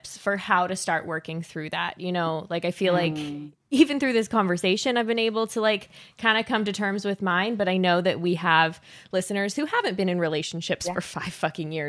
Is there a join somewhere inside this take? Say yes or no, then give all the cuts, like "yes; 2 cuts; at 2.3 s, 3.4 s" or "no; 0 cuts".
no; 0 cuts